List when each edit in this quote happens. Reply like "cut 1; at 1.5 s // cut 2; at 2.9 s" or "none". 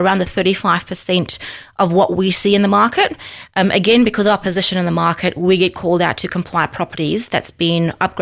none